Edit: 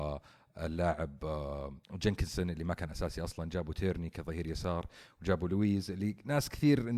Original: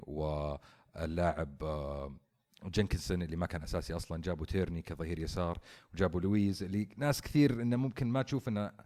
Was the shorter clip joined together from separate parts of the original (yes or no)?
yes